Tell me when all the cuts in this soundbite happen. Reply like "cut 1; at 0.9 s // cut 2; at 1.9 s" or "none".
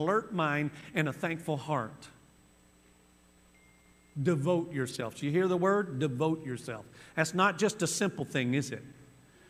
none

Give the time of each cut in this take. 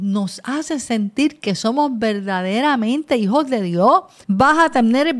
cut 1; at 4.2 s

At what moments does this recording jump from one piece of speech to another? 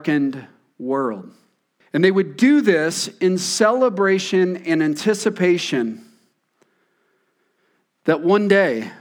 cut 1; at 1.8 s

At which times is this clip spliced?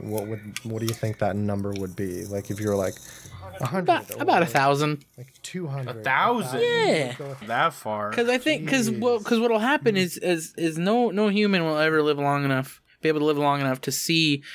cut 1; at 7.4 s

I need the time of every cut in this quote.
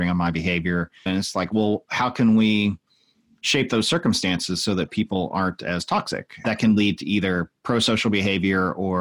cut 1; at 1.1 s // cut 2; at 6.4 s

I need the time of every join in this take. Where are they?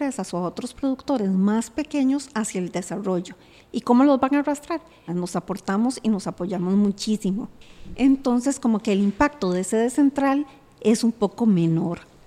cut 1; at 5.1 s

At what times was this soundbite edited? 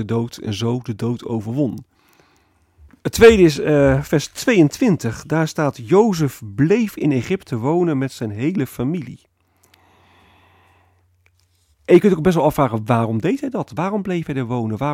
cut 1; at 2.9 s

